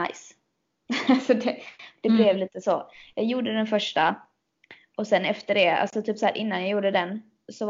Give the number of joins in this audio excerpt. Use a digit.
0